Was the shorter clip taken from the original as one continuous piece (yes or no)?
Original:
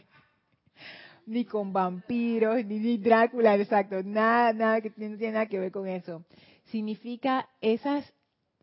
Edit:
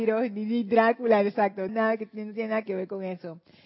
no